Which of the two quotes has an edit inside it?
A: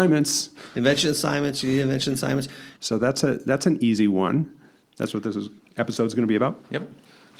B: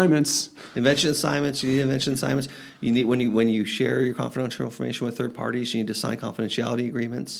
A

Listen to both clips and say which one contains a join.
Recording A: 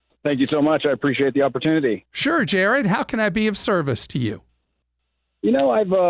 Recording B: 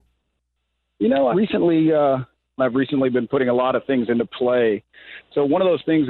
B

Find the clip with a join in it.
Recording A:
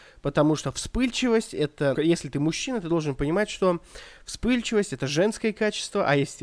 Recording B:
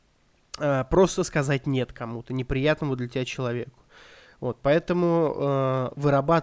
A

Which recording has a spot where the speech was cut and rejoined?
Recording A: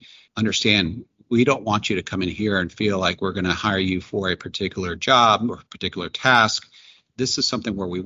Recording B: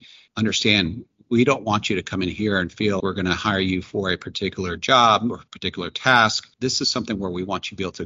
B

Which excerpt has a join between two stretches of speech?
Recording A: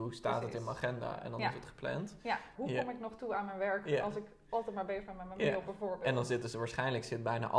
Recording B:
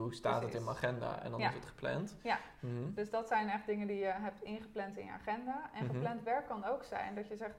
A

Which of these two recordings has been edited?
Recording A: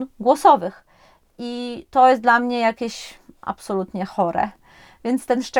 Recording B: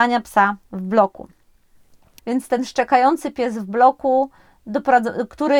B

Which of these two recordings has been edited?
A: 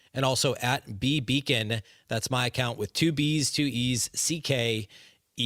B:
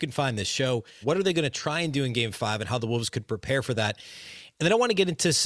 B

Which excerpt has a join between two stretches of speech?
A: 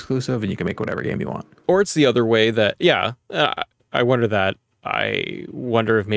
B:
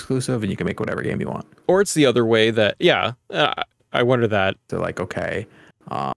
B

